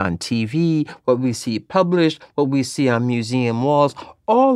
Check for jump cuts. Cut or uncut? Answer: uncut